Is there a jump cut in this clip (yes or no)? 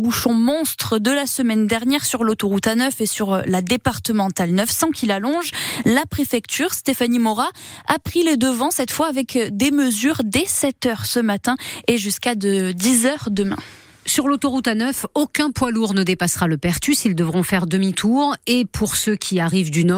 no